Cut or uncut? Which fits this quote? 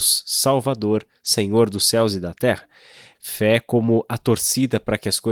cut